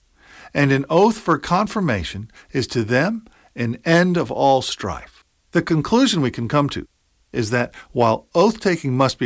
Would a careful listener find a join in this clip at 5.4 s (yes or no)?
yes